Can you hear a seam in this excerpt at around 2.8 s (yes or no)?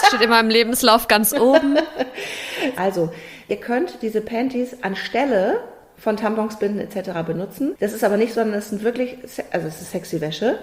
yes